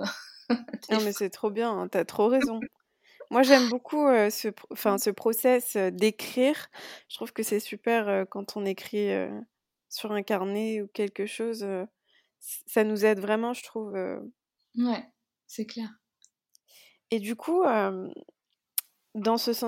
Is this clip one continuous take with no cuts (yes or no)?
yes